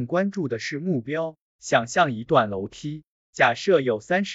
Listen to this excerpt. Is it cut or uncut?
cut